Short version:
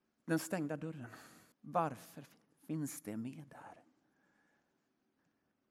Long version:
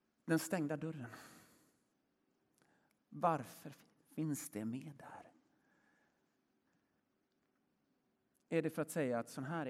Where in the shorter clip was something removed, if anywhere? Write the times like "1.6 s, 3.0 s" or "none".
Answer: 1.5 s